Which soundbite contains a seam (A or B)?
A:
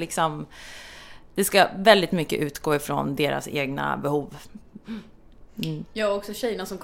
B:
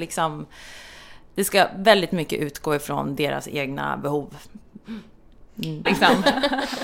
B